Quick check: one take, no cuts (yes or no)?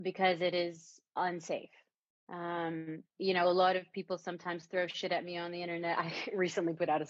no